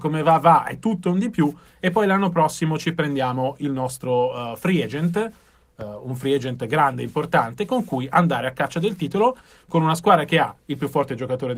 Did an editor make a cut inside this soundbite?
no; 0 cuts

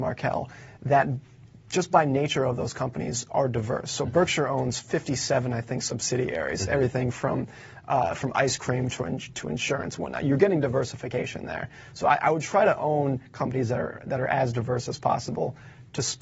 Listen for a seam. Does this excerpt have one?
no; 0 cuts

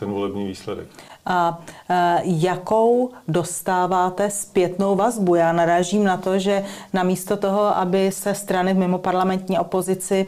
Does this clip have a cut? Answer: no; 0 cuts

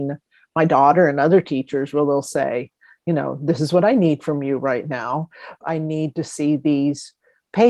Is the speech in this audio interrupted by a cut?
yes; 1 cut; at 5.6 s

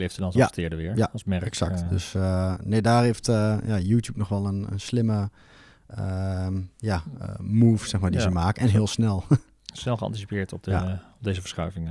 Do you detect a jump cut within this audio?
no; 0 cuts

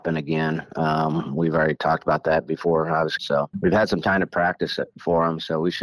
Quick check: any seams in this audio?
yes; 1 cut; at 3.2 s

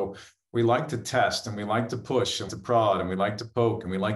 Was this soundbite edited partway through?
yes; 1 cut; at 2.5 s

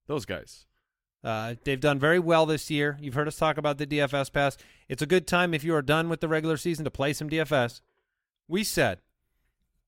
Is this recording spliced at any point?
no; 0 cuts

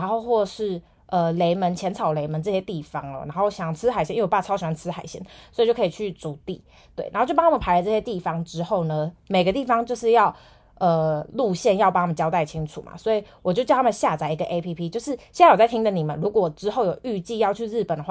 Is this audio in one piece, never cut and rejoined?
yes; 0 cuts

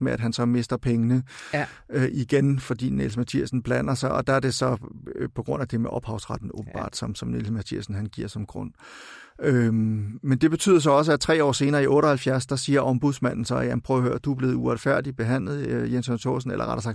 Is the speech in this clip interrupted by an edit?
no; 0 cuts

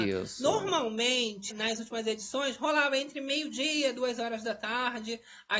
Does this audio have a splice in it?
yes; 1 cut; at 1.5 s

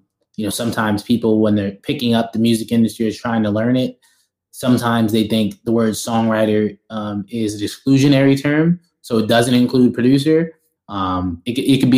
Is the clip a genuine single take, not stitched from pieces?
no; 1 cut; at 10.8 s

